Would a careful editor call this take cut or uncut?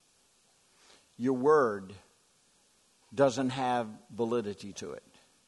uncut